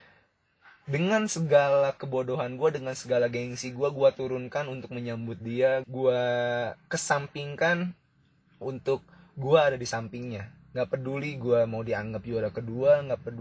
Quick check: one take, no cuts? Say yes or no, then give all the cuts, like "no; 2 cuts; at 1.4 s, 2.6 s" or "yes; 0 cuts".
no; 1 cut; at 5.8 s